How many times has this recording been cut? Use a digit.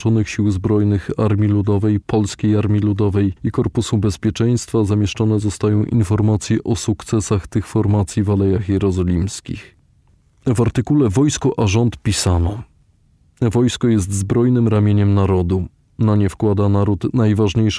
0